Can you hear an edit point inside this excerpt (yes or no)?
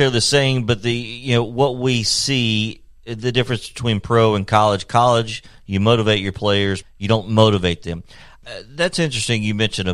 yes